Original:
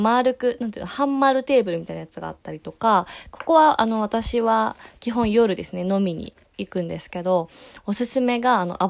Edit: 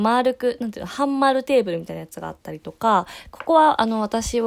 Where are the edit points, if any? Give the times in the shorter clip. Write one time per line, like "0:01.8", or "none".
none